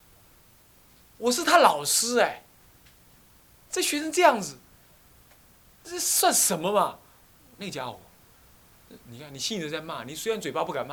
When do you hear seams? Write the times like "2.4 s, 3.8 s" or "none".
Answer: 5.8 s, 7.6 s